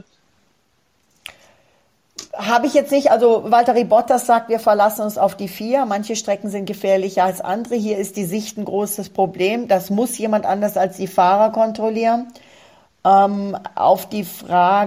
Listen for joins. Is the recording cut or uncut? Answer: uncut